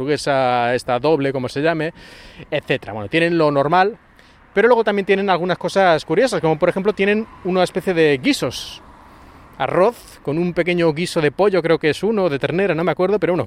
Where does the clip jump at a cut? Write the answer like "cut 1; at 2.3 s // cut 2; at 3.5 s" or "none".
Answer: none